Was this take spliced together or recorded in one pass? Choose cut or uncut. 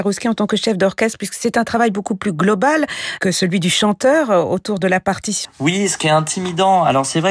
cut